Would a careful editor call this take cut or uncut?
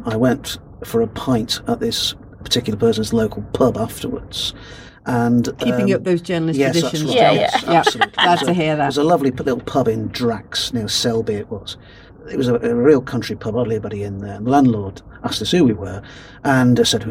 uncut